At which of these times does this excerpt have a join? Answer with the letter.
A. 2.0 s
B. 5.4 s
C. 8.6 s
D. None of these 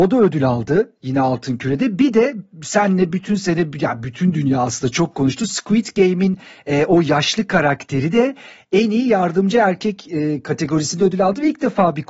D